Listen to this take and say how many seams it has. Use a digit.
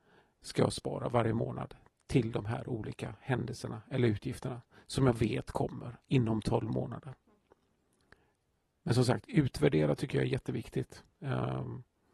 1